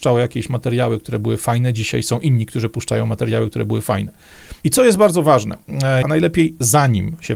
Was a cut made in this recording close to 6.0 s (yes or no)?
yes